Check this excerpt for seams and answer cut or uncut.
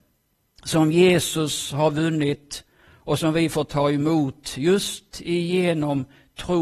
uncut